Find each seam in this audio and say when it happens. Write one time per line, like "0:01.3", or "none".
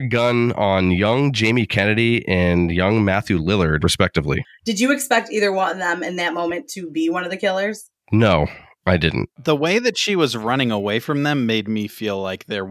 0:03.8